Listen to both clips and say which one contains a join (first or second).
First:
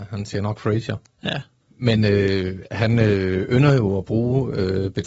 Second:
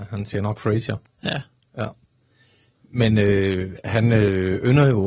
first